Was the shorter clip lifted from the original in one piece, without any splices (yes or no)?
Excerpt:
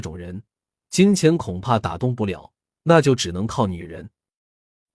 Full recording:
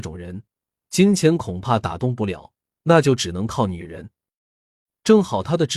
yes